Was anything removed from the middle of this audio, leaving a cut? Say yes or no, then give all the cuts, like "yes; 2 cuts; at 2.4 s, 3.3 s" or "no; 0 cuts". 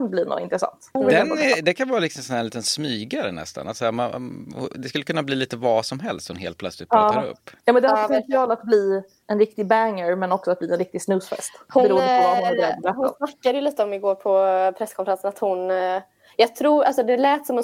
no; 0 cuts